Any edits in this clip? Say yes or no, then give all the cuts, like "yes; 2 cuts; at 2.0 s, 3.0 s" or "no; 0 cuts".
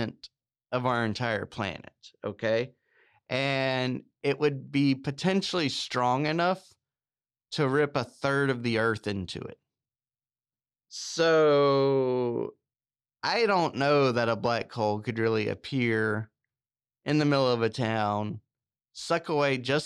no; 0 cuts